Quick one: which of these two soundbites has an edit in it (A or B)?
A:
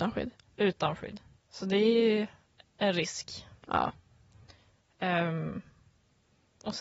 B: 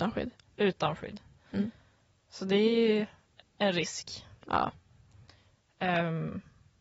A